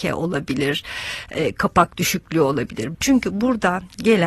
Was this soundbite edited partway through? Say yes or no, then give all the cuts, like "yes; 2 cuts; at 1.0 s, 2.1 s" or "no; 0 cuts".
yes; 1 cut; at 2.9 s